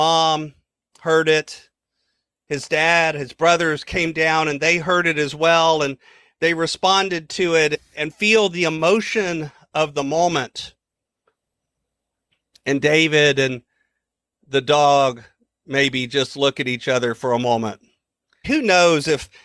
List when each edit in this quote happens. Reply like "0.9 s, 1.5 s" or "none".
18.4 s